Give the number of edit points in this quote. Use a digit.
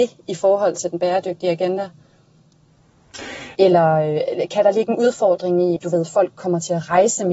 2